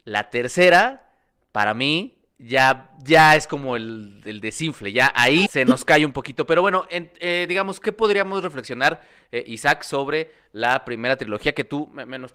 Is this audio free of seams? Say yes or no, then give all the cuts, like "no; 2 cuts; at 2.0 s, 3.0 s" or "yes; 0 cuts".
no; 1 cut; at 5.5 s